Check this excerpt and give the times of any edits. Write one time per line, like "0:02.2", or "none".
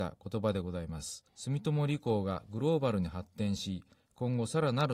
0:01.3